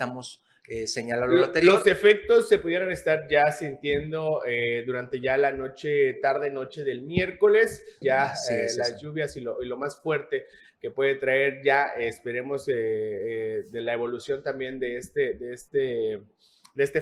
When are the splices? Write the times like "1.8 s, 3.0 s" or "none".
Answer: 8.0 s